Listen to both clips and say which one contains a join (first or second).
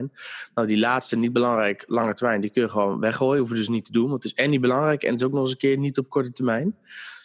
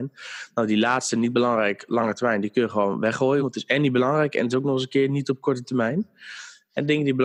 second